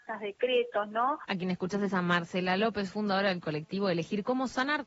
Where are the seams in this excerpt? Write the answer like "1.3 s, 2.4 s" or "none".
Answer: 1.2 s